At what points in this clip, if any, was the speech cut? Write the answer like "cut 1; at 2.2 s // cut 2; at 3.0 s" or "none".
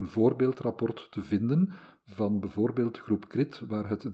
none